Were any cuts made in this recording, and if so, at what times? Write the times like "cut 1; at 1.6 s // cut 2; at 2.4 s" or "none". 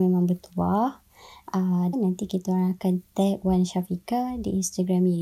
cut 1; at 1.9 s